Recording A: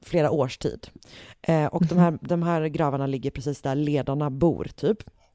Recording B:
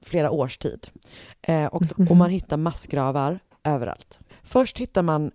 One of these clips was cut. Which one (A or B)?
B